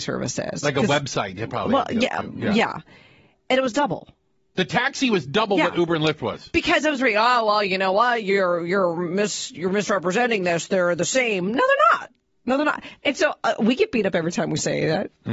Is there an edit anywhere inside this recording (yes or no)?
no